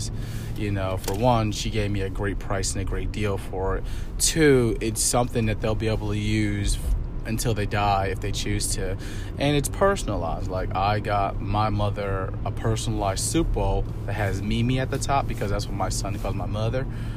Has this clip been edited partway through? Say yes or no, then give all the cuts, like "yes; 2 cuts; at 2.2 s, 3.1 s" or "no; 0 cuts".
no; 0 cuts